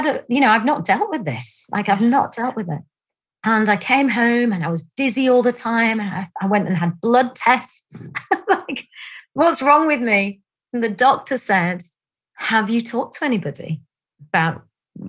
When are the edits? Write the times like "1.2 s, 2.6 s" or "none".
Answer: none